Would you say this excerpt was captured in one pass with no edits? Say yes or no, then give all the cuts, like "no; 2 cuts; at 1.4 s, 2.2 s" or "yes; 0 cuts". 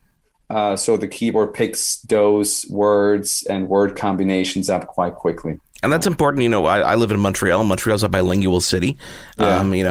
yes; 0 cuts